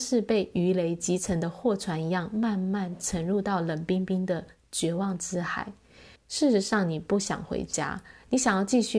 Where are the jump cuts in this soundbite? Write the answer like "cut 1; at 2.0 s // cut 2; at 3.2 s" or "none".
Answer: cut 1; at 6.2 s